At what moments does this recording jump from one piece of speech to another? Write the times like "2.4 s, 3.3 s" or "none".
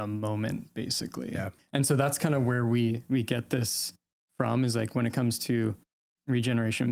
1.6 s